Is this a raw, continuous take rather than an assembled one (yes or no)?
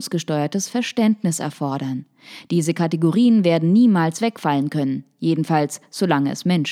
yes